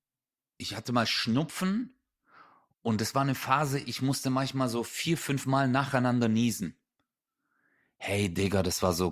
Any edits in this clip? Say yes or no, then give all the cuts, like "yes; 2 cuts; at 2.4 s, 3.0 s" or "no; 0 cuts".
no; 0 cuts